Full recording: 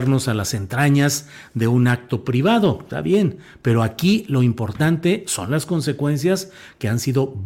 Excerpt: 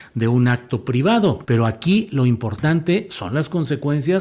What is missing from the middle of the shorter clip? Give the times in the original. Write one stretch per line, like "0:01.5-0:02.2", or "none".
0:02.8-0:03.6